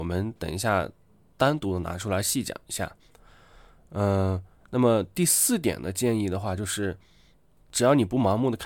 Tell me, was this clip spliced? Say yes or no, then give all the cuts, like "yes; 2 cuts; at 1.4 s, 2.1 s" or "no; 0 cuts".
no; 0 cuts